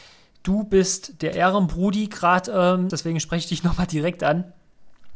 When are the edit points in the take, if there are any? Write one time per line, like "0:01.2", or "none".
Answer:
0:02.9